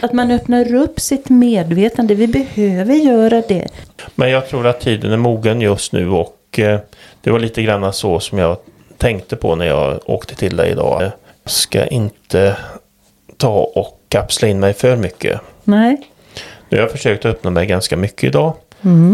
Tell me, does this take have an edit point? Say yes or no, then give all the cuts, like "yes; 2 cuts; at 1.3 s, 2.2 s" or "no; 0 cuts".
yes; 1 cut; at 11.0 s